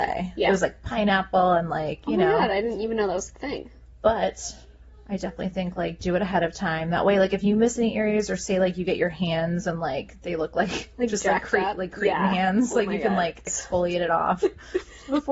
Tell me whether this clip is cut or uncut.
uncut